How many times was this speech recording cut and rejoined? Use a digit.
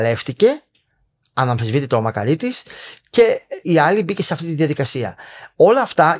1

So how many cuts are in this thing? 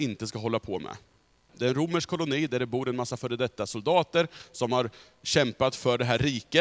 1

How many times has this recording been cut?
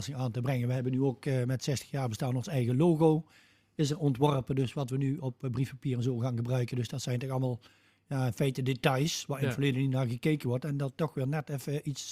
0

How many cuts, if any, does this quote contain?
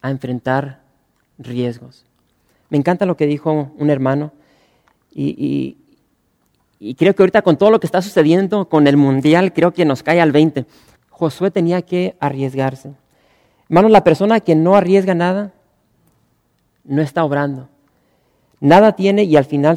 1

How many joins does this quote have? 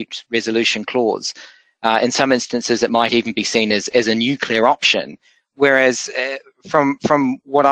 0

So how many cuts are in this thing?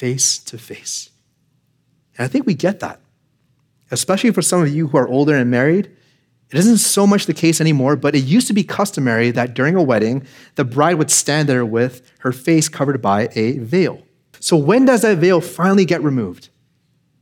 1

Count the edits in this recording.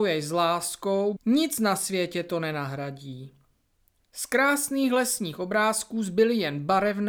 2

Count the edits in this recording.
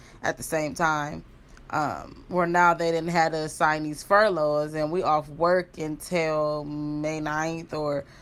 0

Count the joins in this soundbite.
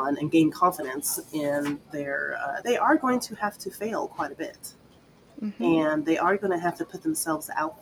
1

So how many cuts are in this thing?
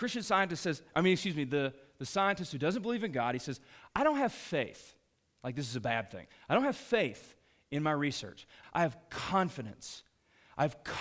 1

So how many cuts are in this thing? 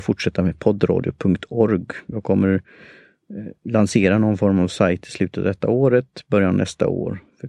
0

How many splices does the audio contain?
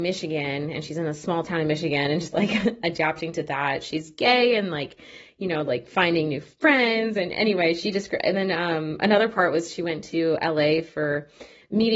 0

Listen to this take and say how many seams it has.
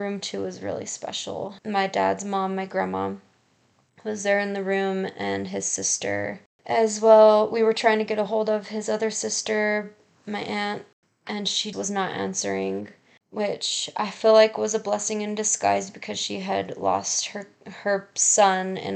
1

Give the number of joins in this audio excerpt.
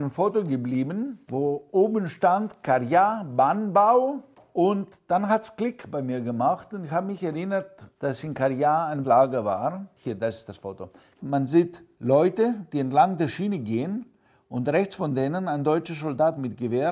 0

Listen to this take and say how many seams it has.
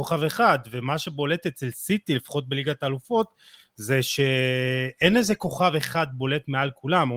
0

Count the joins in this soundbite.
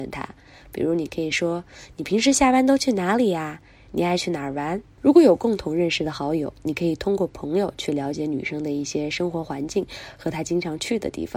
1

